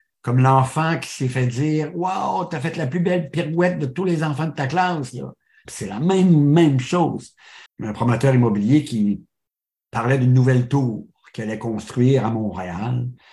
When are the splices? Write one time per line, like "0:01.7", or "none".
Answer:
0:05.6
0:07.7

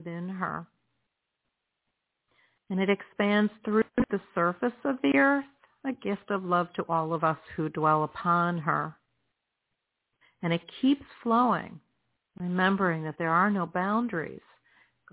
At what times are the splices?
none

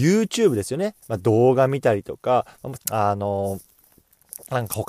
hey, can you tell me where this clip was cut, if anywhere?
0:01.0
0:02.8

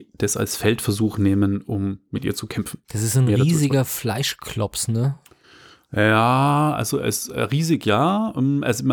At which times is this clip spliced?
none

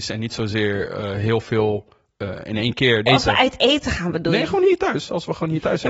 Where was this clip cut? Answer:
0:03.1

